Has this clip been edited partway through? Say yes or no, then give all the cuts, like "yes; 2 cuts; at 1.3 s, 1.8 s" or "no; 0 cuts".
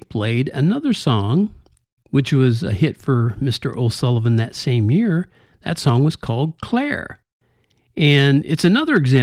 no; 0 cuts